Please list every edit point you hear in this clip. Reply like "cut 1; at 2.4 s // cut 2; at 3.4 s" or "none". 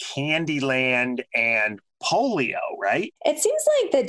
cut 1; at 3.2 s